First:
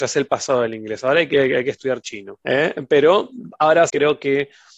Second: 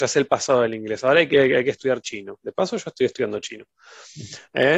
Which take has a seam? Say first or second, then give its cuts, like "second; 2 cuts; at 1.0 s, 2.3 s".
first; 2 cuts; at 2.4 s, 3.9 s